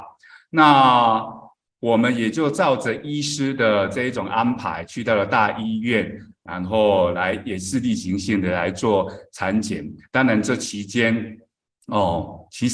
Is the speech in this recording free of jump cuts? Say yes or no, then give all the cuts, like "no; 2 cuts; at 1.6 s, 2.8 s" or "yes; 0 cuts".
yes; 0 cuts